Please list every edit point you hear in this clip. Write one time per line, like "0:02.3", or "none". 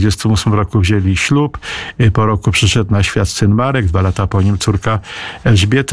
none